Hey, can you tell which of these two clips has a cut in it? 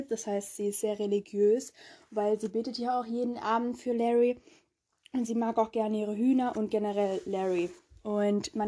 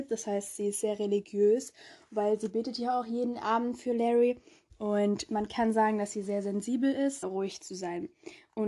second; 2 cuts; at 4.7 s, 7.2 s

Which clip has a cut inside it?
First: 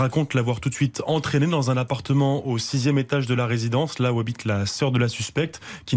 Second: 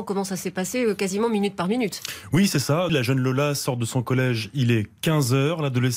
second; 1 cut; at 2.9 s

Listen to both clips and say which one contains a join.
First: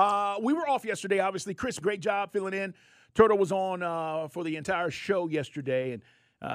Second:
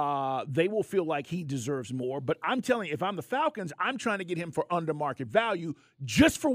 first; 1 cut; at 1.8 s

